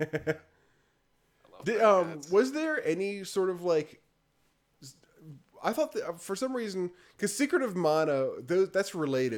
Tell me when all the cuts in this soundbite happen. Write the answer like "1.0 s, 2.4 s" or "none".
none